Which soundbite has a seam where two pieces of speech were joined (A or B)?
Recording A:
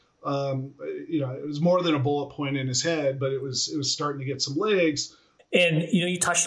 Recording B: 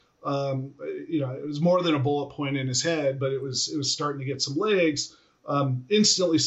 A